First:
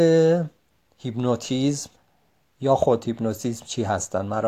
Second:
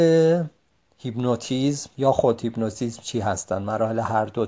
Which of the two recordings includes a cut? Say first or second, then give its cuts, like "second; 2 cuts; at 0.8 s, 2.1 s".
second; 1 cut; at 1.9 s